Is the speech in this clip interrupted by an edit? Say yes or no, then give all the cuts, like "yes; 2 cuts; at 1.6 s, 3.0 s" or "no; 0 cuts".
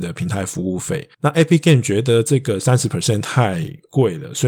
yes; 1 cut; at 1.1 s